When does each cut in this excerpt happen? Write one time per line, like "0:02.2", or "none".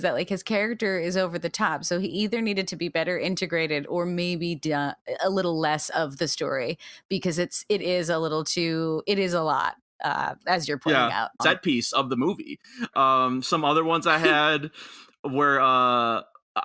0:11.4
0:12.9